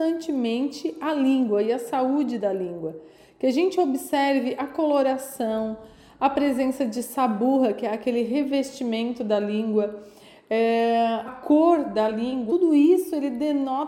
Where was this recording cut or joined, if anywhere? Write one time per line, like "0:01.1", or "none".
0:11.3
0:12.5